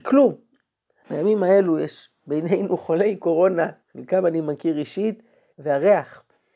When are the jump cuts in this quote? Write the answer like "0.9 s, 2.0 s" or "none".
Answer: 1.0 s, 3.8 s, 5.5 s